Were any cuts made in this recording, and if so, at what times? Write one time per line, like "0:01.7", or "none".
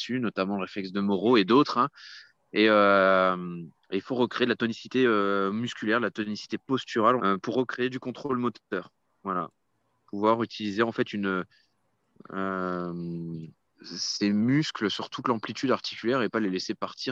0:07.2